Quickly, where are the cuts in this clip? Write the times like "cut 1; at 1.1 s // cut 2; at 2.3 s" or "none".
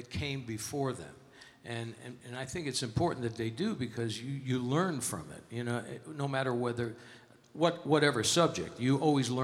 none